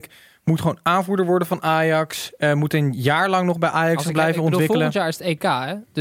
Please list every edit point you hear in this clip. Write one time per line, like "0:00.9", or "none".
none